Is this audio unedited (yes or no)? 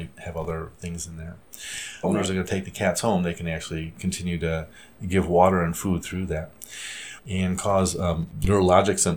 no